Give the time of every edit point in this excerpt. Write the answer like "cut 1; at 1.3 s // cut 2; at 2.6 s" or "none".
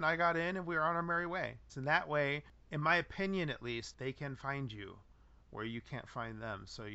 cut 1; at 1.7 s // cut 2; at 3.9 s